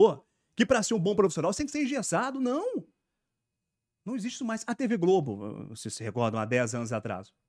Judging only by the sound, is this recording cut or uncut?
uncut